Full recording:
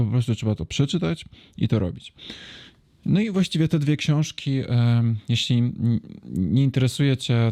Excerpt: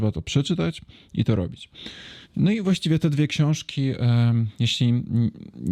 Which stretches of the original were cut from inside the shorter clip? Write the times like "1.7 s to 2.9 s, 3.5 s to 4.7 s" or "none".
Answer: 2.7 s to 2.9 s